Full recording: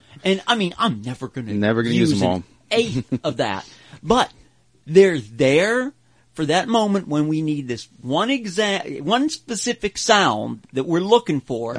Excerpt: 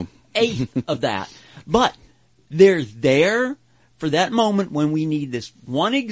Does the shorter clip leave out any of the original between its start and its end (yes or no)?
no